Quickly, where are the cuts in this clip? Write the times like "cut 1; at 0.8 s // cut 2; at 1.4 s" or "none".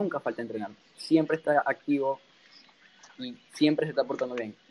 none